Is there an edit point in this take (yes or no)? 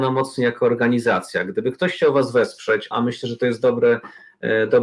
yes